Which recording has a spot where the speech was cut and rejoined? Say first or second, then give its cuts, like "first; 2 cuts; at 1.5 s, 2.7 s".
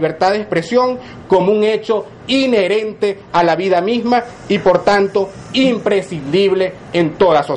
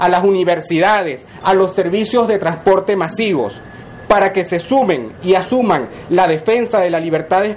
second; 1 cut; at 1.4 s